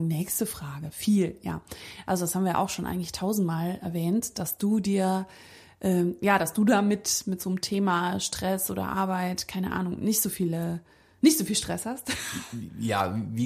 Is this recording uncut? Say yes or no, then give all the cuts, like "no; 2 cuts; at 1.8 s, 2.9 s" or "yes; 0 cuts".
yes; 0 cuts